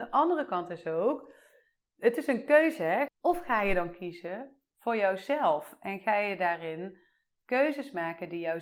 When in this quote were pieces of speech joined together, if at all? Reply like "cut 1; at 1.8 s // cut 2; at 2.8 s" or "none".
cut 1; at 3.1 s